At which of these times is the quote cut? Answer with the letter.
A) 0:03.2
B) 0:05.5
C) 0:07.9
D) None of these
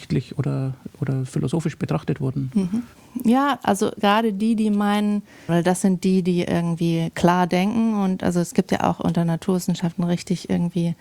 B